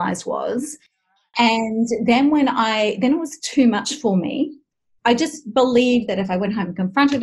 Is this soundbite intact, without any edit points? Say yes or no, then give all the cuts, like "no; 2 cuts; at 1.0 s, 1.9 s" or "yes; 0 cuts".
no; 1 cut; at 5.0 s